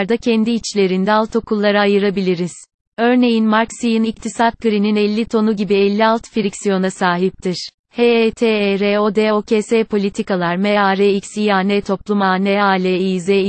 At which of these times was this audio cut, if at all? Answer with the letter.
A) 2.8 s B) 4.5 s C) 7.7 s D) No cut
C